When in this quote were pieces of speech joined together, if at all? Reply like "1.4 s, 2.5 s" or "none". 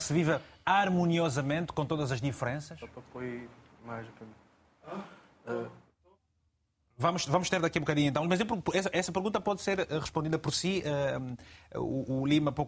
none